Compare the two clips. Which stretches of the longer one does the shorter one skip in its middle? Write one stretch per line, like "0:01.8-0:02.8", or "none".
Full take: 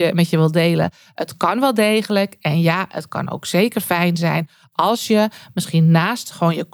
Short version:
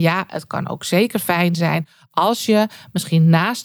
none